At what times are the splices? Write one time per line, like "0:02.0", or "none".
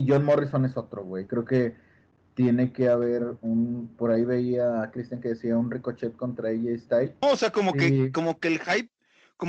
0:01.3
0:07.2